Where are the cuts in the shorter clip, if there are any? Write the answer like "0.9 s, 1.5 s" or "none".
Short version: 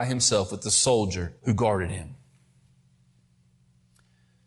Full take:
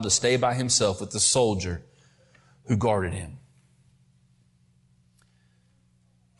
1.4 s